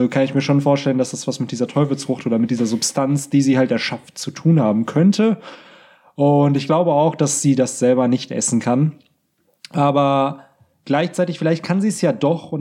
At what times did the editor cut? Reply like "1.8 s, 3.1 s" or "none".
none